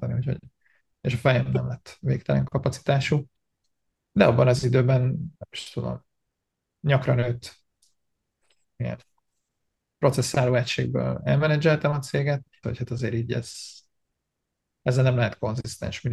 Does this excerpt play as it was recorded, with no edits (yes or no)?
no